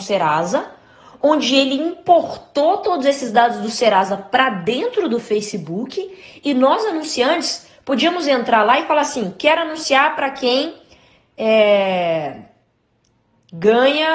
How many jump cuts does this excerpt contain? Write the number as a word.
zero